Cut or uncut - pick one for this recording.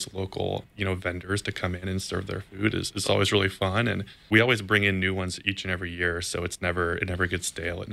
uncut